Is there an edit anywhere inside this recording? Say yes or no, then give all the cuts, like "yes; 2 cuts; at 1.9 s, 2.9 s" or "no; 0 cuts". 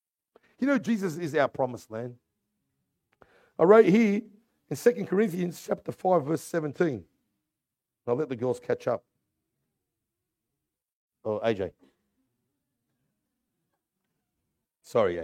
no; 0 cuts